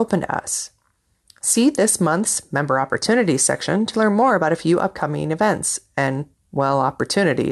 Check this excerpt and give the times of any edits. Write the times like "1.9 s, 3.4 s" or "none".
none